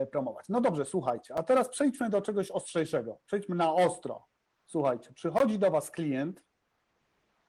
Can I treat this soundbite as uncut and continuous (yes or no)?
yes